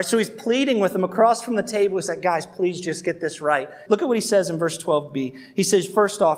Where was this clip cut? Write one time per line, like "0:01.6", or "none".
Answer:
0:03.9